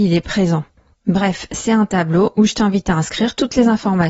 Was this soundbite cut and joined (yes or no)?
yes